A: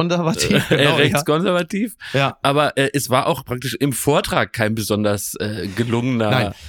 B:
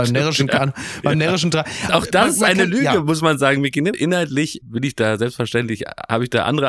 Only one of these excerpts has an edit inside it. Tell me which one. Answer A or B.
B